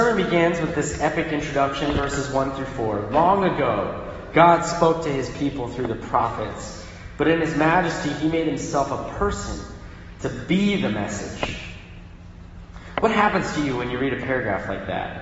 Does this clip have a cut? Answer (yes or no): no